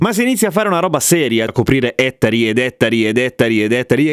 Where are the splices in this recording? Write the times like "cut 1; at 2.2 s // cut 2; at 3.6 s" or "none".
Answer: cut 1; at 1.5 s